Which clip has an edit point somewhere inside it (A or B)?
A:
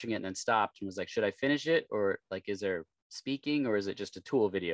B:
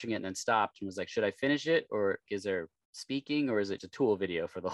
B